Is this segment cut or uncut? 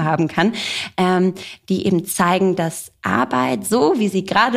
uncut